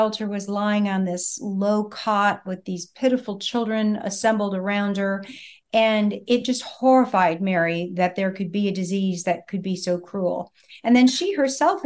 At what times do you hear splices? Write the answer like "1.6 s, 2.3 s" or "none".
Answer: none